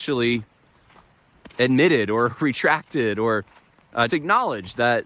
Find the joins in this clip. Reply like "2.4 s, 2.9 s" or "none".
4.1 s

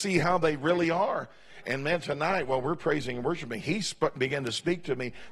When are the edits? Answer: 1.6 s

